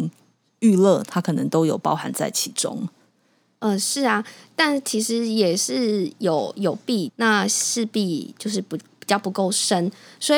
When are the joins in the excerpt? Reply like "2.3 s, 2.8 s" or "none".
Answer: 7.1 s